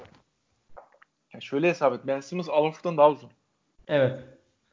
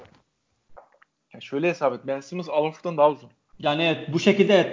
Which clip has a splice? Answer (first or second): second